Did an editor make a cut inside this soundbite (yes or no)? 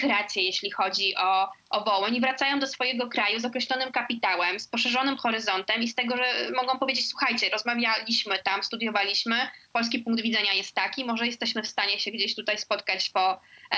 no